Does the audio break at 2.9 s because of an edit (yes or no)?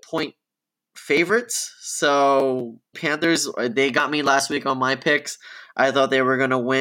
yes